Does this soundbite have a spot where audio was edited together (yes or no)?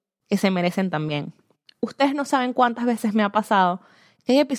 no